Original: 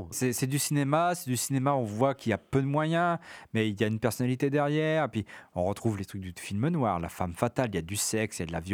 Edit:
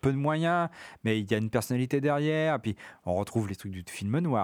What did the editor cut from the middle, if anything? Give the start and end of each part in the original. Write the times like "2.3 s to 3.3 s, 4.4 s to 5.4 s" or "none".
none